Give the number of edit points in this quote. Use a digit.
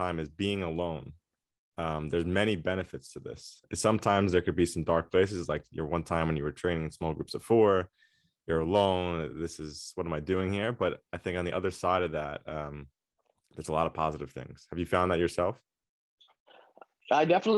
0